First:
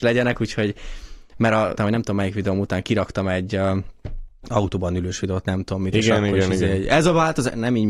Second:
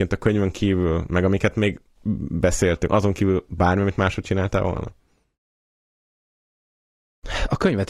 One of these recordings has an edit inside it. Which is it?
first; 1 cut; at 1.8 s

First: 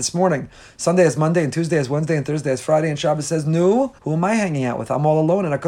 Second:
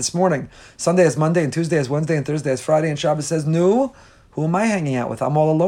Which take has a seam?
first; 1 cut; at 4.0 s

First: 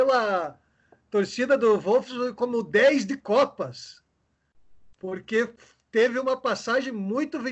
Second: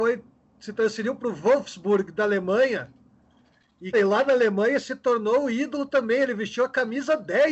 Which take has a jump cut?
second; 1 cut; at 3.9 s

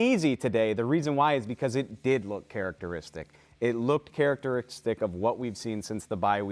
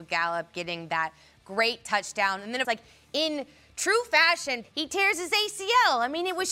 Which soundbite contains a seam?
second; 2 cuts; at 2.6 s, 4.6 s

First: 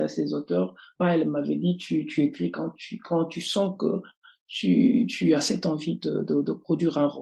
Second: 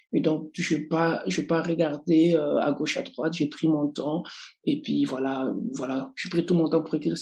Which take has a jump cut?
first; 1 cut; at 1.0 s

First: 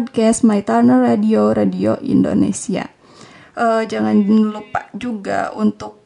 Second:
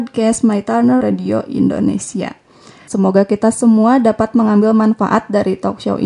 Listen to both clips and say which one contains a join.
second; 2 cuts; at 1.0 s, 2.9 s

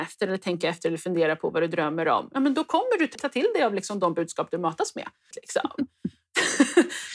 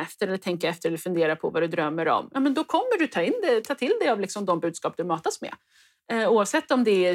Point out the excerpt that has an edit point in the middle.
first; 2 cuts; at 3.2 s, 5.3 s

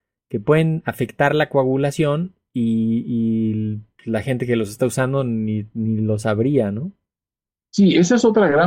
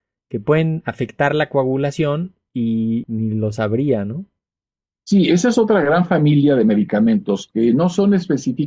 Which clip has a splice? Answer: second; 1 cut; at 3.0 s

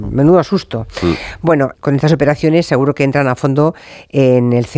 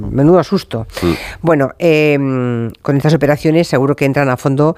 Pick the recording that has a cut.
first; 1 cut; at 1.7 s

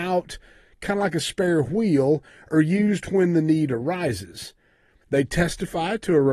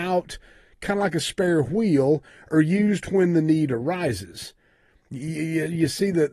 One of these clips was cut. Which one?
first; 1 cut; at 5.0 s

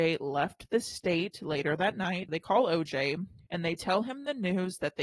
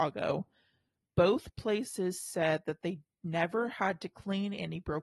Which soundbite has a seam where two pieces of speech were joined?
first; 2 cuts; at 2.3 s, 3.5 s

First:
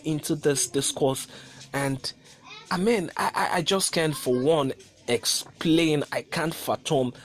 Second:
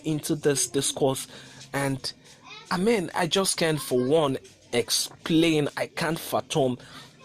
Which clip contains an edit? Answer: second; 1 cut; at 3.1 s

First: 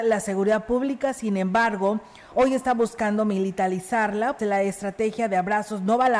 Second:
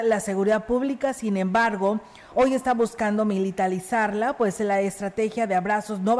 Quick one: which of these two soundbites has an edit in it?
first; 1 cut; at 4.4 s

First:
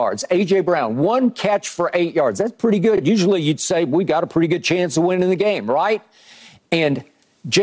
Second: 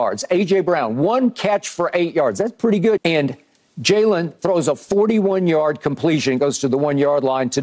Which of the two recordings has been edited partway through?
second; 1 cut; at 3.0 s

